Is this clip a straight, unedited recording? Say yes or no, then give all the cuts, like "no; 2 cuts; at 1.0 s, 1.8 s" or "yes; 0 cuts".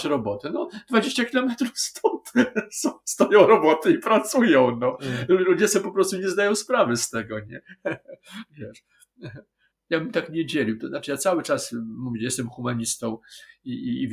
no; 1 cut; at 9.7 s